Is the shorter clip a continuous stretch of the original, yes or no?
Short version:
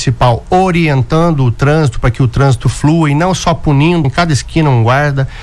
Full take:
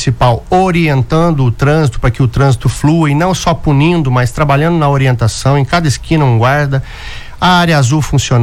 no